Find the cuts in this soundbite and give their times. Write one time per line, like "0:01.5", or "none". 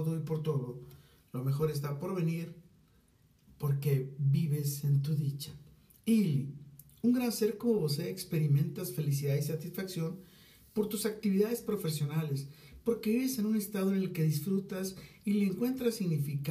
0:06.0

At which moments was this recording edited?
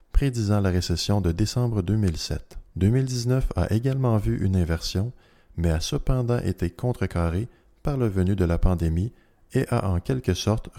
0:02.7

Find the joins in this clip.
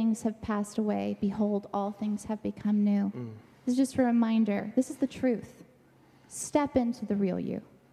none

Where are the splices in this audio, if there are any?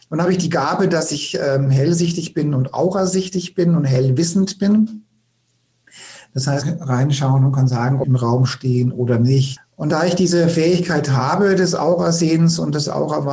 0:06.6
0:08.0
0:09.6

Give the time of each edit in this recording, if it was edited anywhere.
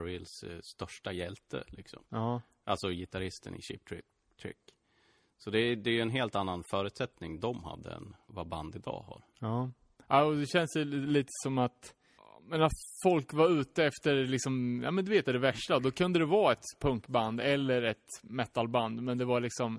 0:08.3
0:15.2

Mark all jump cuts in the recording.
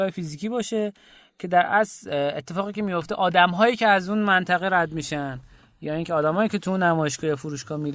none

